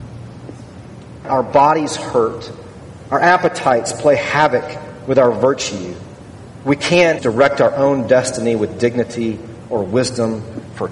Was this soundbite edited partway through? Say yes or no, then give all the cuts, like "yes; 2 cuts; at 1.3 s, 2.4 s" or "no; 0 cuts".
yes; 2 cuts; at 1.2 s, 7.2 s